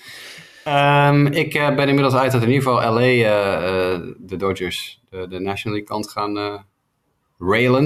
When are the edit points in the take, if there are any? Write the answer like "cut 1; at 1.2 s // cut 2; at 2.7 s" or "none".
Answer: none